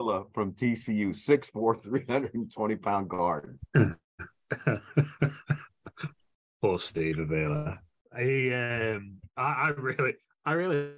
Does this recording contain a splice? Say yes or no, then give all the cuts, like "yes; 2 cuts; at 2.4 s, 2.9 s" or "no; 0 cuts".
no; 0 cuts